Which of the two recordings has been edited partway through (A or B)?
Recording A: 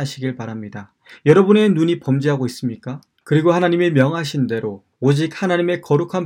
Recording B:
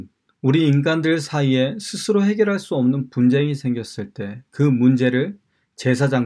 A